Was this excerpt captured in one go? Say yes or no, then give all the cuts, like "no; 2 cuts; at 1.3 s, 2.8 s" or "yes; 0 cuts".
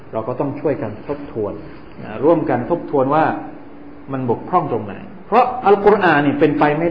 yes; 0 cuts